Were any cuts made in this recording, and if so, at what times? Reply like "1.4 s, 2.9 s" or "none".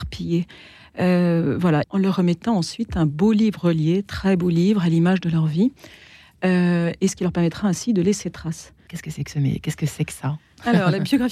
1.8 s, 8.9 s